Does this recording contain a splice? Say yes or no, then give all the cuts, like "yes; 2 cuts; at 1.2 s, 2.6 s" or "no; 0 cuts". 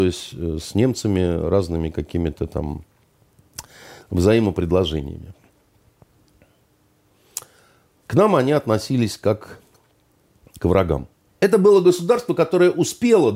yes; 1 cut; at 11.3 s